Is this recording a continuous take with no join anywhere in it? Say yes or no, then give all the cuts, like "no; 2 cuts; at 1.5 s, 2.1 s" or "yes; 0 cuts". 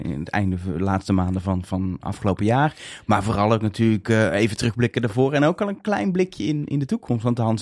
yes; 0 cuts